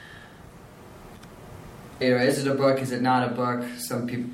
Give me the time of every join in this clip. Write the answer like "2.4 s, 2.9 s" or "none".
2.0 s